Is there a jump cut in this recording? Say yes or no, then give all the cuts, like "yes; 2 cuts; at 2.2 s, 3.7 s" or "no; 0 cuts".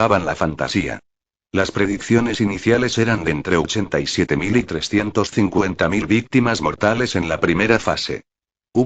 no; 0 cuts